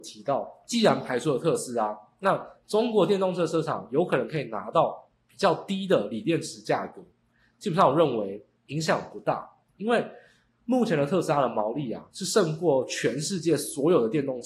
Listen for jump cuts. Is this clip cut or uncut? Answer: cut